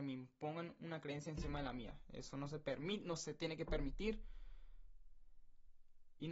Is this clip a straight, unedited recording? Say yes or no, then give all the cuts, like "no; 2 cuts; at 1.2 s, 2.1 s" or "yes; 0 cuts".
yes; 0 cuts